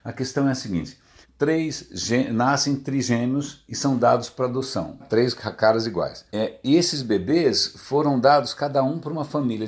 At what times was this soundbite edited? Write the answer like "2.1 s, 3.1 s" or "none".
1.2 s, 5.0 s, 6.3 s